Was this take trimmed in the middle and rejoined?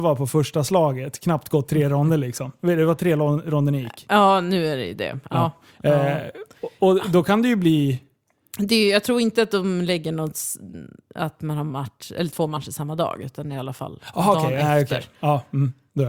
no; 0 cuts

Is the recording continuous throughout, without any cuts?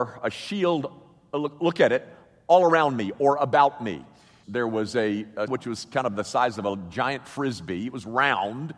no; 2 cuts; at 4.4 s, 5.5 s

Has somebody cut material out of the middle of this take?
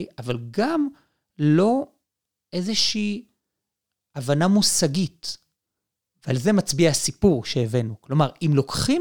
no; 0 cuts

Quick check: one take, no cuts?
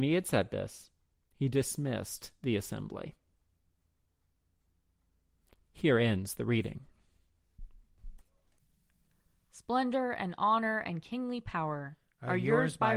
yes; 0 cuts

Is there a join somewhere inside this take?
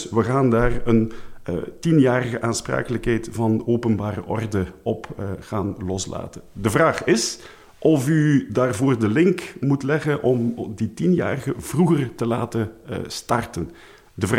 no; 0 cuts

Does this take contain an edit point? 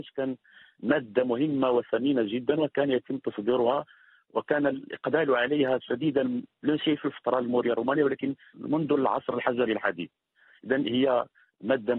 yes; 1 cut; at 8.5 s

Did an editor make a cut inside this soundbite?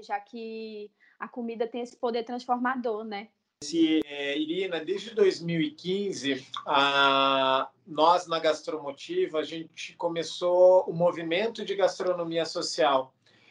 no; 0 cuts

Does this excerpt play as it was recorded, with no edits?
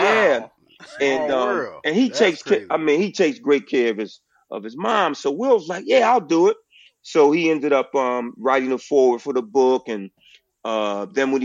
yes; 0 cuts

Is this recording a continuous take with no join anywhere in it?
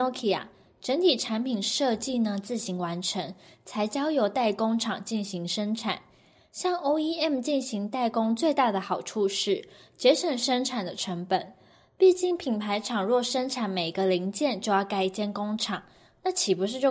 yes; 0 cuts

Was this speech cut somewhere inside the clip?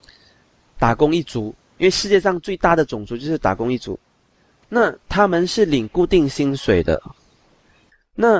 no; 0 cuts

